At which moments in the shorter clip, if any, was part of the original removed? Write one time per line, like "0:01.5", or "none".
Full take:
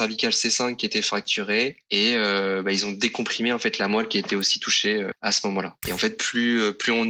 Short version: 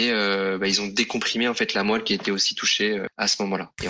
none